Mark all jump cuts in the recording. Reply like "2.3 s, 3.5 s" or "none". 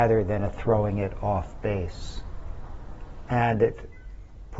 3.3 s